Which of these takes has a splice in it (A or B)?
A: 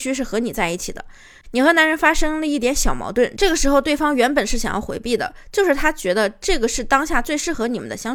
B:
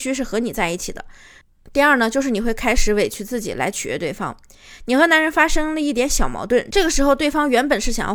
A